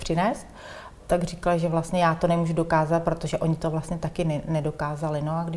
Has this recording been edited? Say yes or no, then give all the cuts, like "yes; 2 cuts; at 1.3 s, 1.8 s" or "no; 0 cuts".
yes; 1 cut; at 1.0 s